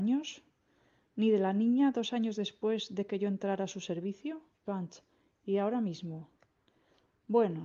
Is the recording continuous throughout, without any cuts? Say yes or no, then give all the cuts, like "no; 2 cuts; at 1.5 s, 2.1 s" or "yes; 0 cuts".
no; 1 cut; at 4.6 s